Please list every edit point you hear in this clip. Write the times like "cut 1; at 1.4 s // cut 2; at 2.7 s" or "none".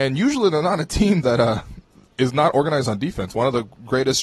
none